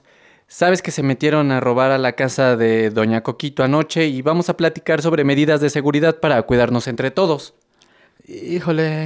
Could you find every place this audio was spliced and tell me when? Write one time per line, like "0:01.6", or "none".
none